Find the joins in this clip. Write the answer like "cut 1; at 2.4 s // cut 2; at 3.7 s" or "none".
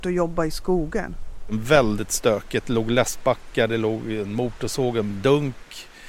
none